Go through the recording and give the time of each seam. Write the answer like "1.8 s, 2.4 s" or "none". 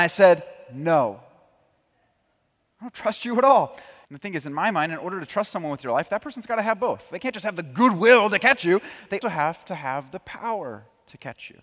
4.0 s, 9.2 s